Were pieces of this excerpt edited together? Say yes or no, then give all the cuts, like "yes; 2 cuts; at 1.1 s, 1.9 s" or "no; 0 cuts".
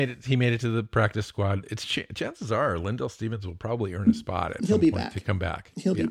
no; 0 cuts